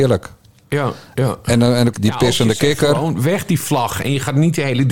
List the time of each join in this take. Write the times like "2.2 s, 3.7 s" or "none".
1.9 s

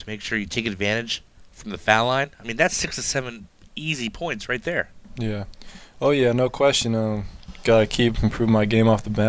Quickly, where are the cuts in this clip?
none

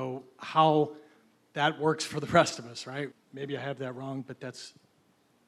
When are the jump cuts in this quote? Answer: 3.1 s

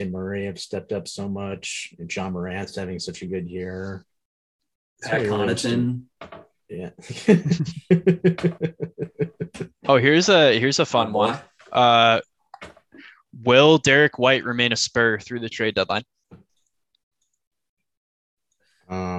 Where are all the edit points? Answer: none

